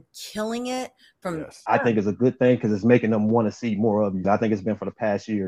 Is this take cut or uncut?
cut